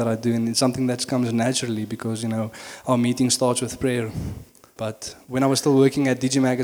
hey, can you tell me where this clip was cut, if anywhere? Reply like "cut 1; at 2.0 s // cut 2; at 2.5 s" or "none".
cut 1; at 4.8 s

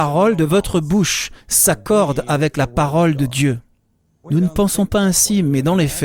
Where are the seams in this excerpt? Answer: cut 1; at 4.2 s

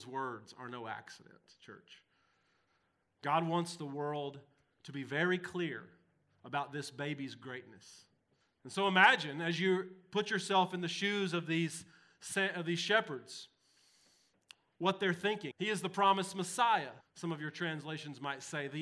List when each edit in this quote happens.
cut 1; at 8.4 s // cut 2; at 15.5 s // cut 3; at 17.0 s

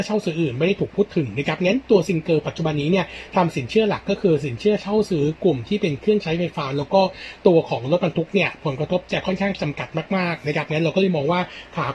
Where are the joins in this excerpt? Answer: none

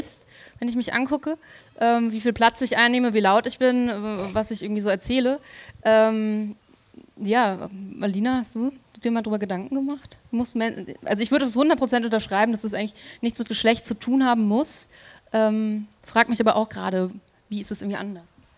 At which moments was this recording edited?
none

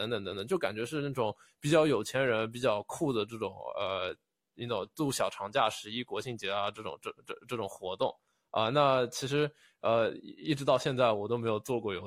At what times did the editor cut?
none

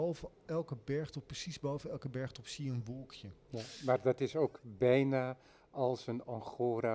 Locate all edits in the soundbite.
none

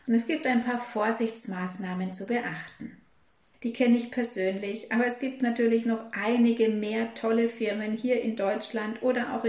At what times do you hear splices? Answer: cut 1; at 3.5 s

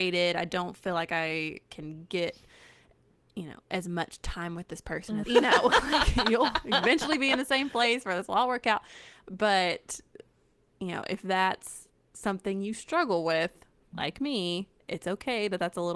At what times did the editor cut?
cut 1; at 5.2 s

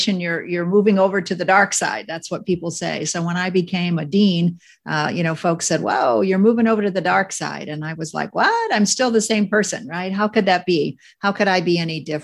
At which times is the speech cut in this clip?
none

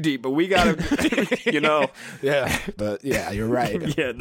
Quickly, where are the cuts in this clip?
cut 1; at 2.8 s

